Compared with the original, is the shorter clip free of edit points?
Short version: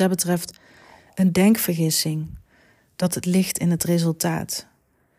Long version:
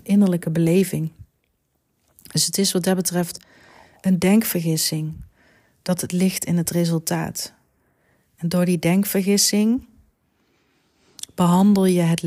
yes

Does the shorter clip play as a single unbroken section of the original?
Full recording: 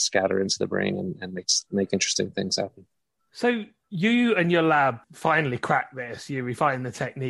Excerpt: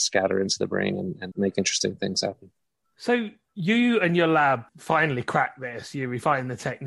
no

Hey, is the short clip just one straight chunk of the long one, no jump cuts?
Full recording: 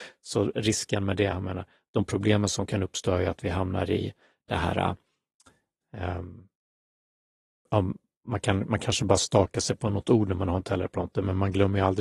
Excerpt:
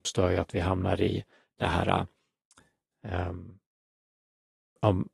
yes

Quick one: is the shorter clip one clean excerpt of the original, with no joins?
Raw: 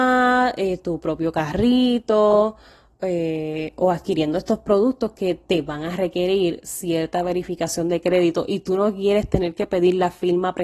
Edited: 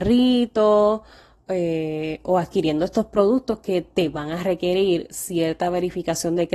yes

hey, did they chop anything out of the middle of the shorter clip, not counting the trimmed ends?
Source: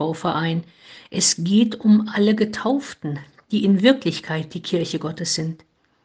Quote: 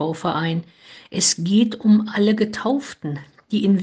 no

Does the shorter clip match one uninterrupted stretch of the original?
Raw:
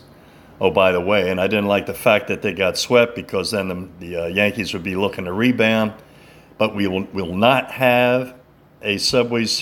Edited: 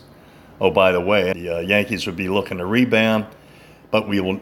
no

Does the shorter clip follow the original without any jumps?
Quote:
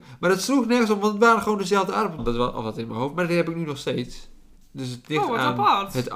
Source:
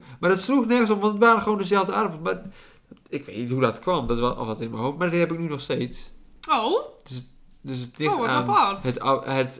no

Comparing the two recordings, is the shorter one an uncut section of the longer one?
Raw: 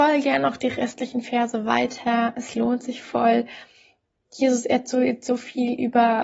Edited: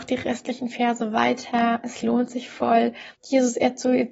no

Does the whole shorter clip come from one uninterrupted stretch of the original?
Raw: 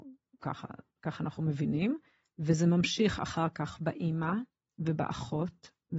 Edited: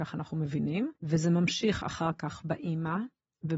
no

